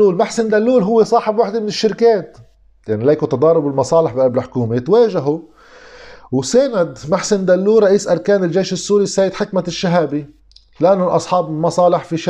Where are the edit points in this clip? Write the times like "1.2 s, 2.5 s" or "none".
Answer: none